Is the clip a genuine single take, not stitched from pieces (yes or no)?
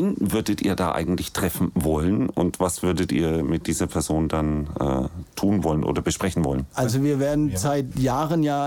yes